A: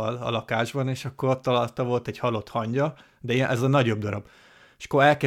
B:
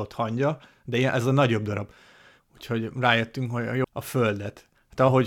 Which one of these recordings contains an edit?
B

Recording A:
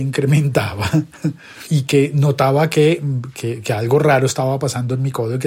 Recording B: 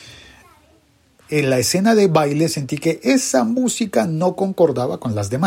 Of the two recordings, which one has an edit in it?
B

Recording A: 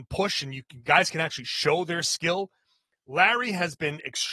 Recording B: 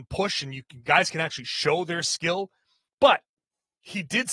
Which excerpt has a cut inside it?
B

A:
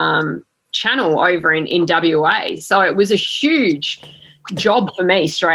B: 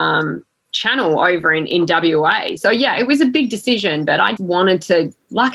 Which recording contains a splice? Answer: B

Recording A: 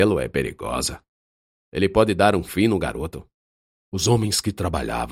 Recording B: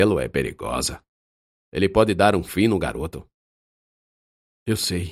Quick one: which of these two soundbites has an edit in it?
A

